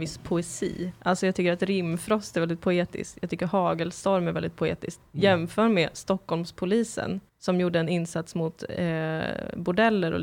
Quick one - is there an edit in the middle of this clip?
yes; 1 cut; at 7.3 s

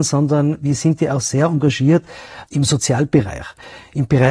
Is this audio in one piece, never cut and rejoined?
no; 1 cut; at 2.5 s

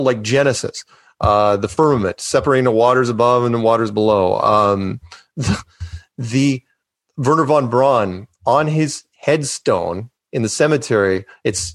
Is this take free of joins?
yes; 0 cuts

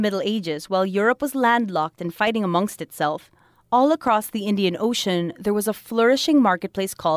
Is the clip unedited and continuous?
yes; 0 cuts

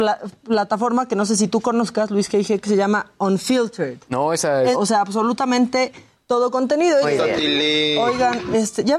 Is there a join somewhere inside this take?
yes; 2 cuts; at 4.7 s, 7.0 s

